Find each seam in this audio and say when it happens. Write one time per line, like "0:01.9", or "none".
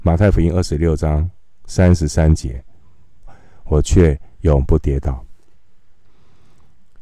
0:03.2